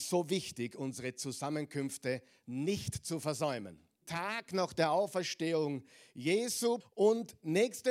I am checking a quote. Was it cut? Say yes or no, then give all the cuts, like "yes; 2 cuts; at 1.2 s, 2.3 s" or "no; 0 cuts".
yes; 2 cuts; at 4.0 s, 6.8 s